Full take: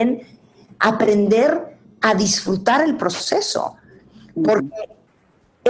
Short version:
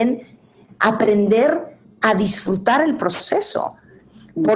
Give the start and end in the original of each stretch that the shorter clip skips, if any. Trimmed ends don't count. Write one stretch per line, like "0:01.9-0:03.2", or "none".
none